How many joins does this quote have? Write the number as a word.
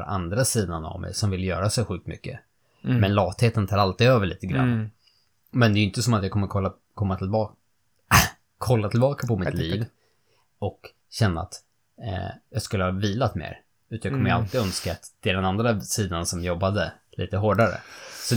zero